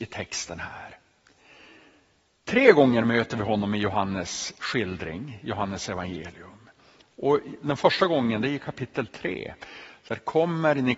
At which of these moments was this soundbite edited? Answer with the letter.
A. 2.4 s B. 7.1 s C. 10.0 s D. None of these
A